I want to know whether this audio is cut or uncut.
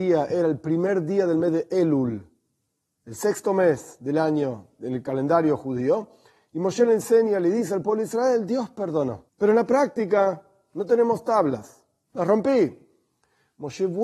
cut